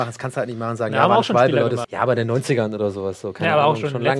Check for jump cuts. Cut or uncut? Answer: cut